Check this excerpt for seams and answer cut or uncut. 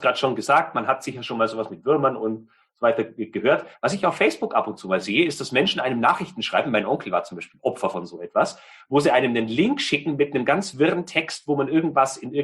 uncut